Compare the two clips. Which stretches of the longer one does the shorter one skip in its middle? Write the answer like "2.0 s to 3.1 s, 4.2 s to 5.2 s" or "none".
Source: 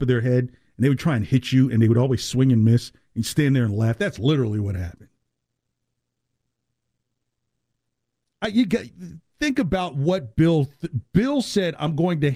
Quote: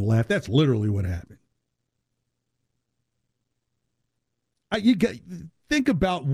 none